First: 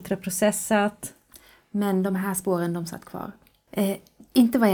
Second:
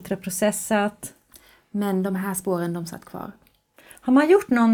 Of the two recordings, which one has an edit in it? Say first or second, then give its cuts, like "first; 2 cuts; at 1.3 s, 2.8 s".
first; 1 cut; at 3.7 s